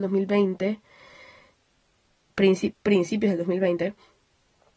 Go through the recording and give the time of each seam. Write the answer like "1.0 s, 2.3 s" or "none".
2.7 s